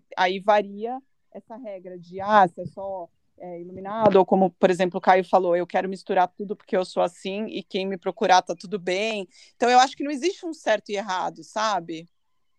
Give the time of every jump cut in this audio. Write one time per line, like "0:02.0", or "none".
none